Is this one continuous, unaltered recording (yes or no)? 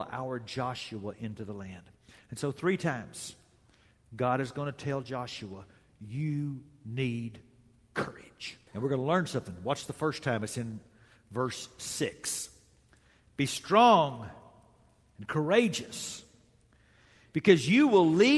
no